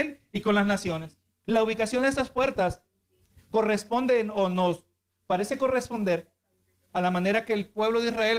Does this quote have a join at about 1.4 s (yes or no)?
yes